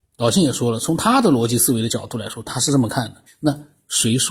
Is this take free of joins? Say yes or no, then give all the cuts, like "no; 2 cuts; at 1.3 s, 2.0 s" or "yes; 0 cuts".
no; 1 cut; at 3.3 s